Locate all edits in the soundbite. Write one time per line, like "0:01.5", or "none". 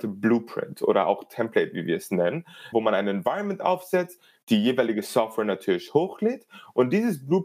0:02.7